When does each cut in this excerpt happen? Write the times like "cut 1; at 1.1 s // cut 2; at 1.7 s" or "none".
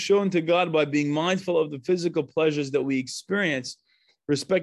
none

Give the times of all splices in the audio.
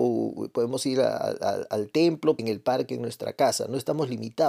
cut 1; at 2.4 s

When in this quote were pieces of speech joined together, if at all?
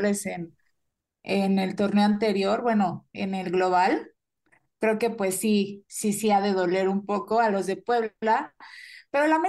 none

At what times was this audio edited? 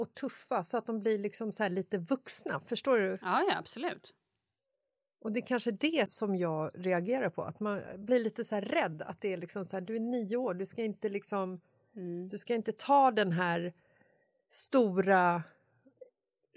cut 1; at 6.1 s

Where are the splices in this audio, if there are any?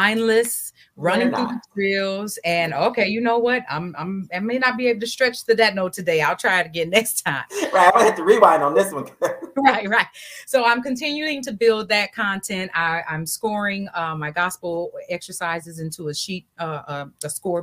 none

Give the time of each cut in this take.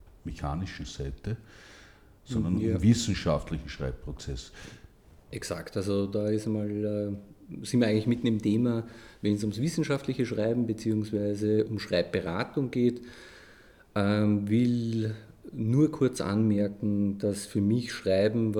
none

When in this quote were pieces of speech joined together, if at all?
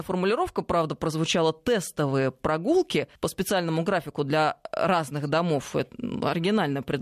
cut 1; at 3.1 s

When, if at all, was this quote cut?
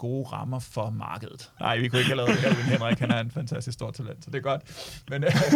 cut 1; at 1.6 s

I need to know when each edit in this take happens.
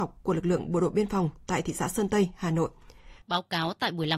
cut 1; at 3.2 s

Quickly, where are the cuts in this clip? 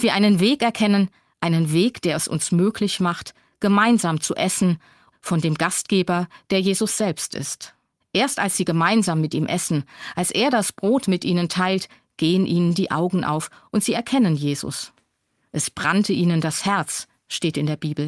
cut 1; at 5.1 s // cut 2; at 8.0 s

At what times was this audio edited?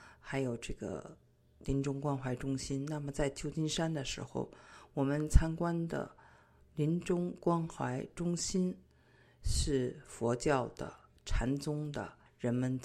none

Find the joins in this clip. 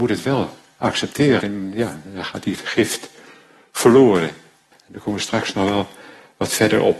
cut 1; at 1.4 s // cut 2; at 4.7 s

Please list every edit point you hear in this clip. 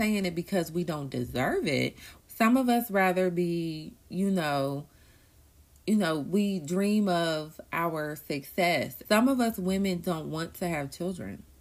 cut 1; at 2.2 s // cut 2; at 9.0 s

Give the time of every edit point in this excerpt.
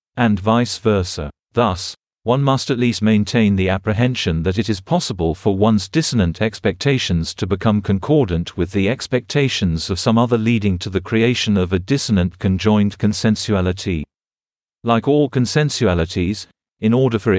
cut 1; at 14.7 s

